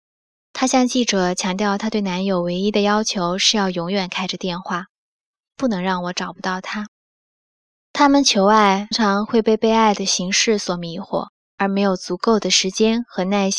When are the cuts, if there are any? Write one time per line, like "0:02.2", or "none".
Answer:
0:07.7
0:08.9